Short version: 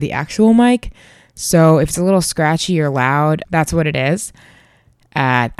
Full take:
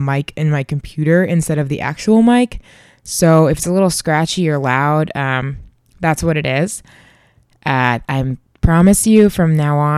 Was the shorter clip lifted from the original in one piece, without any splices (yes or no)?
no